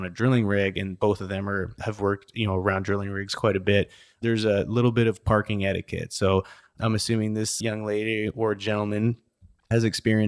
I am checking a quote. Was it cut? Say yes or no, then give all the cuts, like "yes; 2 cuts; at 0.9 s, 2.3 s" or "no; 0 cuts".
yes; 1 cut; at 1.8 s